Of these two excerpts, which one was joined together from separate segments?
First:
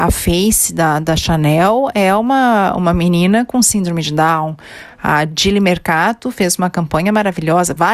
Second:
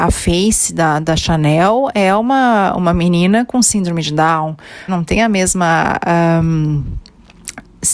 second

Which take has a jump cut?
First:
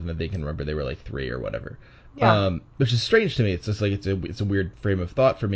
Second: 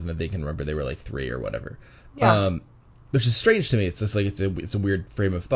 first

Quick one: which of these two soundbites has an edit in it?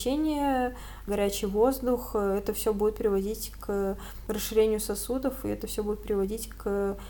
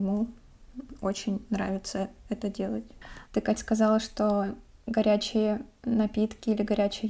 second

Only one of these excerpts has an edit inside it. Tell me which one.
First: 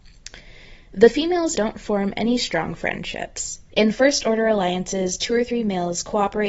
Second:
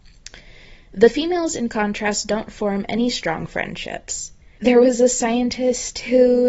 first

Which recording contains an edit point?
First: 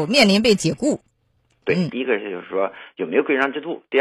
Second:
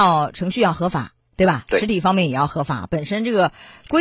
first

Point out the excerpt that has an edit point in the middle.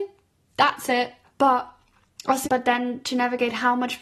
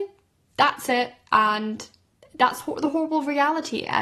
first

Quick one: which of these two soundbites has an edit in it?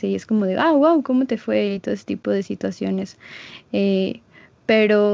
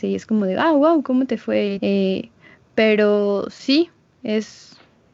second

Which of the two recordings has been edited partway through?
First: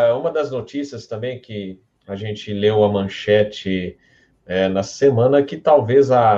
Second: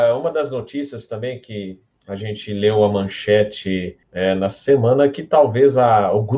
second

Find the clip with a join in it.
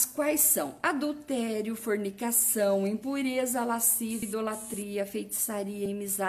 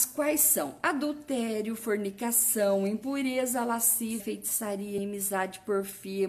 second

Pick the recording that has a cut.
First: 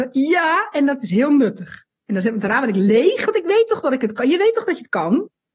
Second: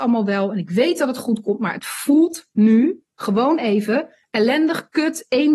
first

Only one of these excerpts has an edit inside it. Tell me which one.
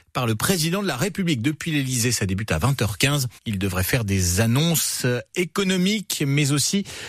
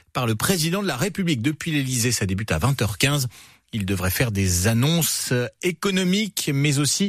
first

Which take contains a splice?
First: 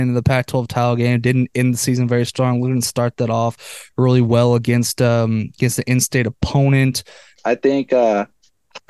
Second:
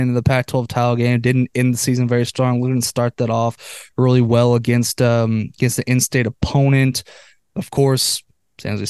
first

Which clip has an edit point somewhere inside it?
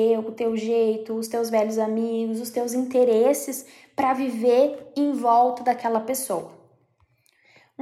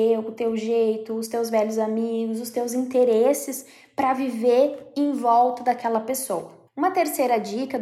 second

